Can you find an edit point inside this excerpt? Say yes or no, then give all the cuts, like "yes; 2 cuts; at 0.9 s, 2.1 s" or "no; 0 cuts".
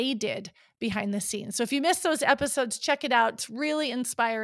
no; 0 cuts